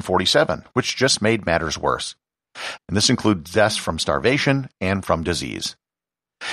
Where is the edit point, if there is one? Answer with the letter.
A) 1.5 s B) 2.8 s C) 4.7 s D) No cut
B